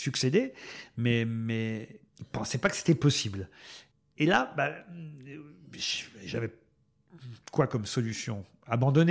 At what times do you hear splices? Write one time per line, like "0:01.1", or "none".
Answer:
0:02.1